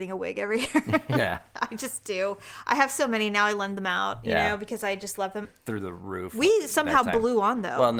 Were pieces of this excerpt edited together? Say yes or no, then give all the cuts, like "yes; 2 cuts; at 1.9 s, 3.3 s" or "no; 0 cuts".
yes; 1 cut; at 5.4 s